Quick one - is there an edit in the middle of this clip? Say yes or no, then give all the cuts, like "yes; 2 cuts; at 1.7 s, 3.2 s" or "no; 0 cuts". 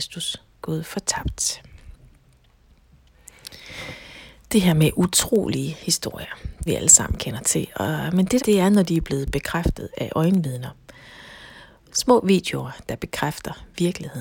yes; 3 cuts; at 6.7 s, 8.4 s, 11.9 s